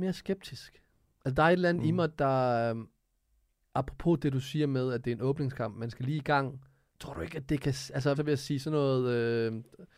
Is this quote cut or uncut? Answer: cut